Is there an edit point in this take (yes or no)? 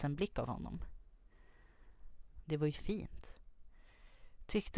yes